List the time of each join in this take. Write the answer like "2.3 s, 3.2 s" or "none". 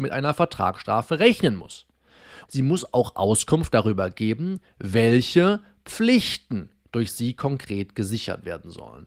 2.5 s